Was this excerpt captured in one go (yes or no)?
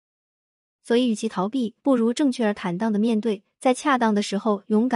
yes